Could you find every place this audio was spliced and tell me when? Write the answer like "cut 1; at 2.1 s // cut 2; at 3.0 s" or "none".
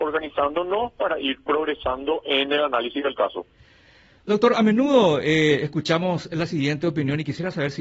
none